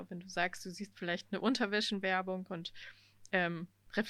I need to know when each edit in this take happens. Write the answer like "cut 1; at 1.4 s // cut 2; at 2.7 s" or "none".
none